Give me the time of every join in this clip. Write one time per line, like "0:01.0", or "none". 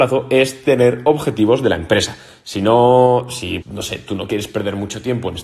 0:03.6